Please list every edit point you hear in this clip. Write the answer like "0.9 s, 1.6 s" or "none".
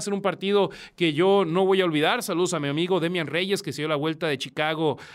none